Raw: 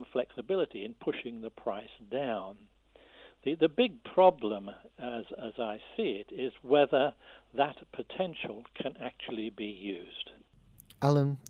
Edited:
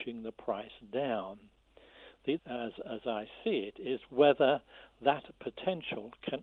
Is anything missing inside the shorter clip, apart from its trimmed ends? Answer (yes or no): yes